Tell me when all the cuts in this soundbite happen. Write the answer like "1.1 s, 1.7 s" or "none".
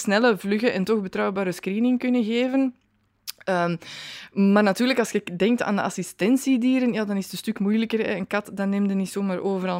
none